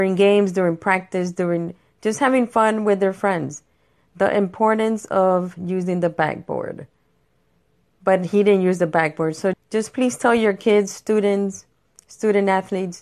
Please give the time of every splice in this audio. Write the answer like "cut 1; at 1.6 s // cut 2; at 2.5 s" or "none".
cut 1; at 8.0 s // cut 2; at 9.5 s